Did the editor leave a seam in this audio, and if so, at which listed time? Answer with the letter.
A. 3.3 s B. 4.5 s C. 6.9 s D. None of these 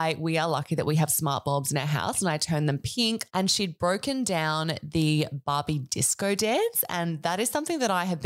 A